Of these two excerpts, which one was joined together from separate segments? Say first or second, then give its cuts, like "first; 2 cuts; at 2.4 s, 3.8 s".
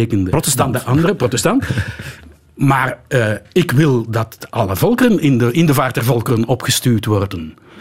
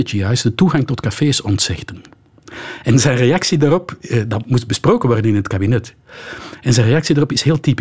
first; 1 cut; at 4.5 s